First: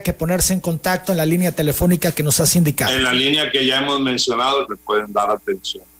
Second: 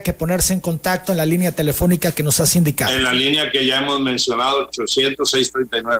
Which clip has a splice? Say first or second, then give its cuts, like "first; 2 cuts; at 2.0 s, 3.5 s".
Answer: first; 1 cut; at 4.7 s